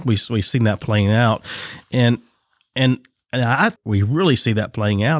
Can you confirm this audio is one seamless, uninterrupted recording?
no; 1 cut; at 3.8 s

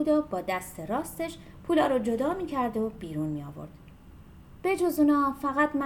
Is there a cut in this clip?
no; 0 cuts

